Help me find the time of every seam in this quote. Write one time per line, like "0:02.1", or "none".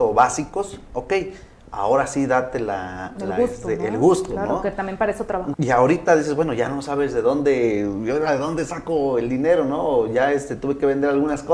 0:05.5